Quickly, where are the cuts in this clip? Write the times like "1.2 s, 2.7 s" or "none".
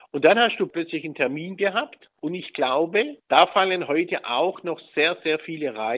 none